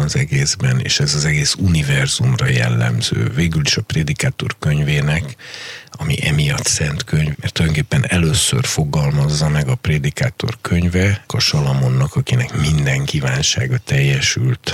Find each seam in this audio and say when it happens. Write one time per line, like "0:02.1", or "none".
0:07.3
0:11.3